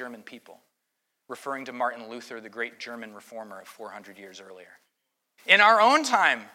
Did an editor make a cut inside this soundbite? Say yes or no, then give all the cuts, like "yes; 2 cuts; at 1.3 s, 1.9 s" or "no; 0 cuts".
yes; 1 cut; at 5.4 s